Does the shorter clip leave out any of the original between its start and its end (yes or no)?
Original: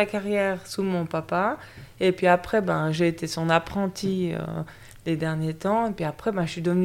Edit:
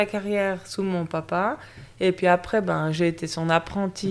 no